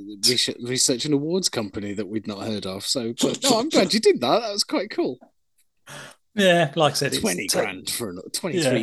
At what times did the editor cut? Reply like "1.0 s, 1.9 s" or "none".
none